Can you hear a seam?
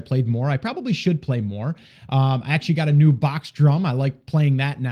no; 0 cuts

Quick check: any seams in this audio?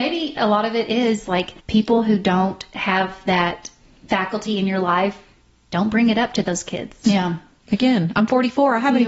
yes; 2 cuts; at 1.6 s, 7.0 s

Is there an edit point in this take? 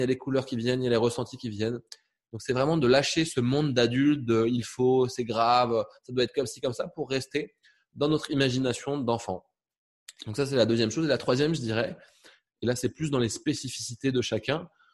no; 0 cuts

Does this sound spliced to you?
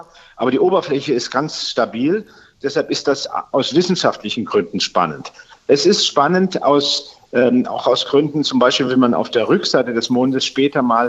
no; 0 cuts

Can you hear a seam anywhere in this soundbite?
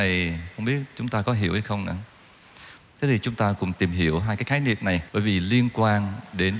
yes; 2 cuts; at 2.8 s, 5.1 s

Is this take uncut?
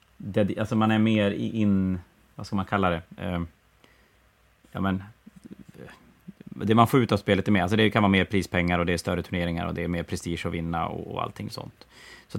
yes; 0 cuts

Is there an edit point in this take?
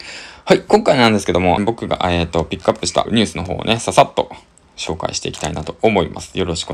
yes; 2 cuts; at 1.6 s, 3.1 s

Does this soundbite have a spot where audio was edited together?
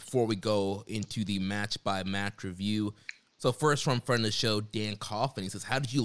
no; 0 cuts

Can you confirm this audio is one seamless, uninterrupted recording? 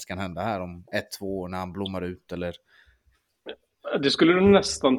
yes; 0 cuts

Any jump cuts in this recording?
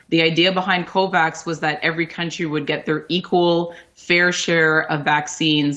no; 0 cuts

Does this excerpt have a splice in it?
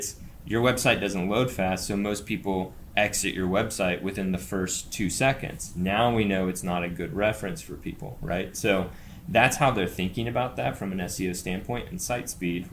no; 0 cuts

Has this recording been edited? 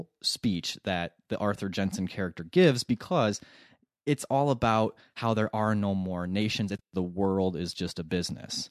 no; 0 cuts

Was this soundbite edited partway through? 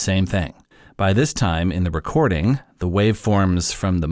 no; 0 cuts

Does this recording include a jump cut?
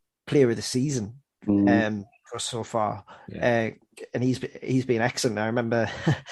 no; 0 cuts

